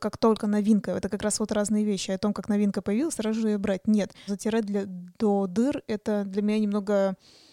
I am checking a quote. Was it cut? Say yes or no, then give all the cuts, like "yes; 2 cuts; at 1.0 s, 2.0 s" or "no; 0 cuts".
yes; 1 cut; at 4.3 s